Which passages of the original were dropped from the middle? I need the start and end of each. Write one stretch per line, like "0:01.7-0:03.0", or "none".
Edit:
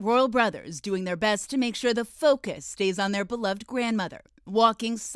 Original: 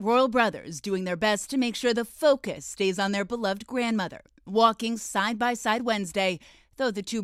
none